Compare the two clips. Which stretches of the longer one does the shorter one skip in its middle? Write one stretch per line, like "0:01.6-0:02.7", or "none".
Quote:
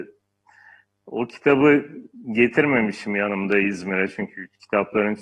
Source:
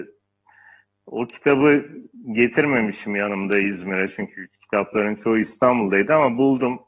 none